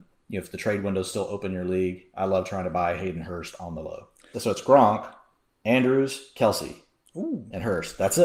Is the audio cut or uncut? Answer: cut